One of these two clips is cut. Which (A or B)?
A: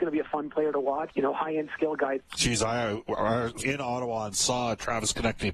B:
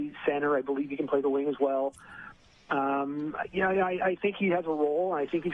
A